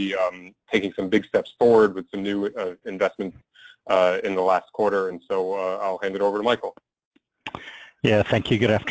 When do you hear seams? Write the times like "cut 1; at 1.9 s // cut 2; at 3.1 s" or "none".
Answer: none